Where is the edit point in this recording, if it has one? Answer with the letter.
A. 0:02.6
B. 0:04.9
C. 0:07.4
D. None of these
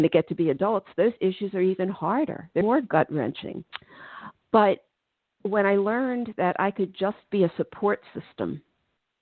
A